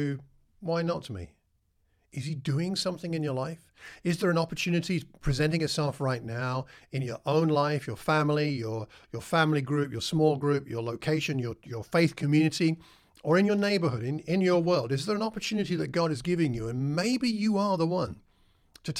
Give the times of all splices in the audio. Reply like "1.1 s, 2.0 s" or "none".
none